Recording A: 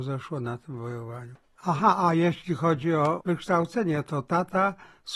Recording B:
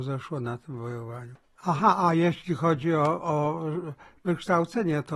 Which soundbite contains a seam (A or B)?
A